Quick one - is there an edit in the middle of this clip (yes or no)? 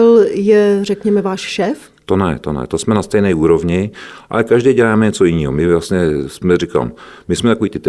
no